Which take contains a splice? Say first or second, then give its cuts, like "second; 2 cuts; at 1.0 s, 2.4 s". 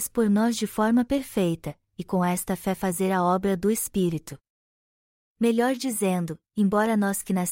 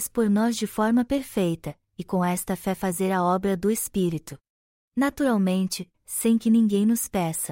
second; 2 cuts; at 4.7 s, 5.9 s